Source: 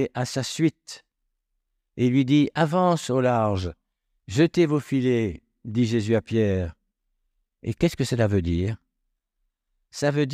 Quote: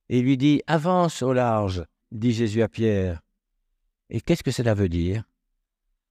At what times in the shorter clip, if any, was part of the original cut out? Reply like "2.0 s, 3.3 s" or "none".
2.0 s